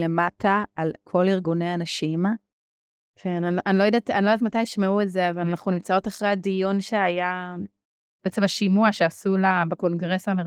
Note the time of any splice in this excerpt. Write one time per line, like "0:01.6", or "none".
none